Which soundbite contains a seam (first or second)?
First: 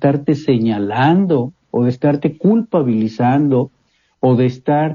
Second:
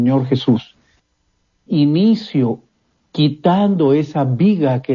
second